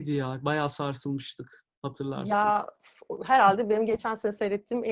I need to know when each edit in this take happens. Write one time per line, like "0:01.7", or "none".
none

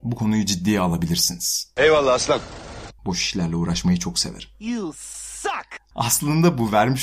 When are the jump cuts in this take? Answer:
0:03.0
0:05.9

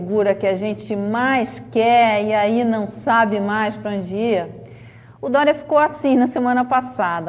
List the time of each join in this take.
none

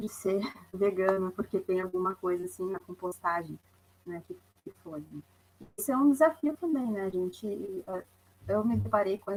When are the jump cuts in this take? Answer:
none

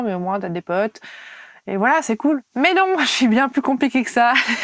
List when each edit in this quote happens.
0:02.5

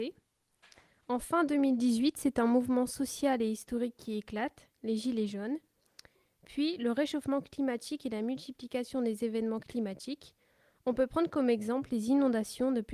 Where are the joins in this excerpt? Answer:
none

